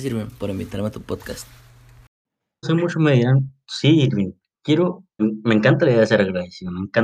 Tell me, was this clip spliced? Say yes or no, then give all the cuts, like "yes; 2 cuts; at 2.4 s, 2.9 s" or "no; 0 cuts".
yes; 2 cuts; at 2.6 s, 5.2 s